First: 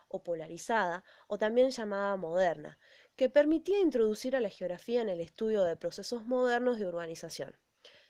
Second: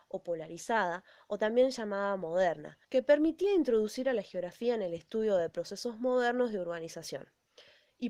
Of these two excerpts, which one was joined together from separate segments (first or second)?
second